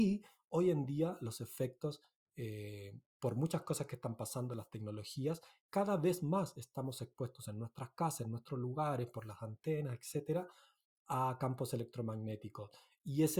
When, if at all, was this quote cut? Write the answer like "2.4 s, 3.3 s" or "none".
none